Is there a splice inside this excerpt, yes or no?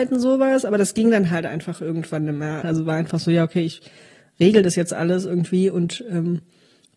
yes